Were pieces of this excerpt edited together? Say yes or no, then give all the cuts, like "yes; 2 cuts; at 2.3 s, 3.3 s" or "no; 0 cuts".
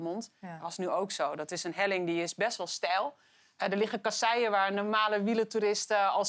no; 0 cuts